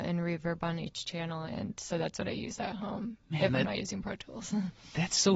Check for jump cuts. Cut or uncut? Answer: cut